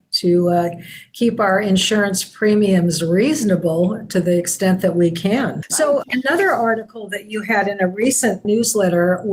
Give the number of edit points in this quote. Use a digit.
0